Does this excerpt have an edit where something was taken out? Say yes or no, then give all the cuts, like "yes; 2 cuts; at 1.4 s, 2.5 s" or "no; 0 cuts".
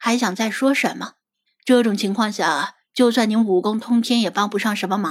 yes; 1 cut; at 1.5 s